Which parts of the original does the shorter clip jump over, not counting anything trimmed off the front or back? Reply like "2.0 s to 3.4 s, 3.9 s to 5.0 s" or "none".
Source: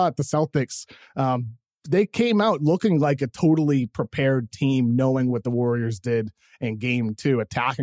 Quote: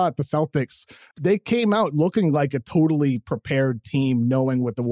1.1 s to 1.8 s